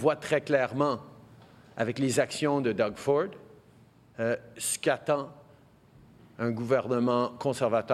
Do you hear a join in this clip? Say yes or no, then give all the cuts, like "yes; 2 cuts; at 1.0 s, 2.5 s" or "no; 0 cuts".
no; 0 cuts